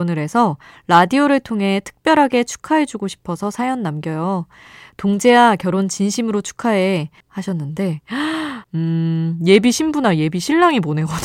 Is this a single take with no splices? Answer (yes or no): no